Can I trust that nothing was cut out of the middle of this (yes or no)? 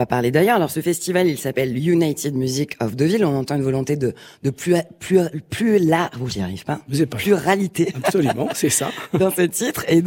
yes